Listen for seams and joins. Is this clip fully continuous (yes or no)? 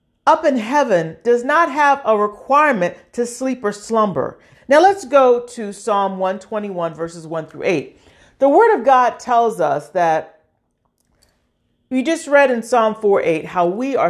no